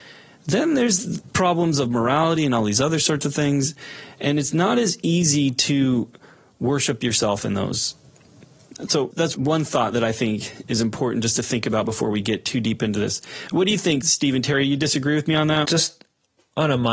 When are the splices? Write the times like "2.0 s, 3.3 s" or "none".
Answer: 15.6 s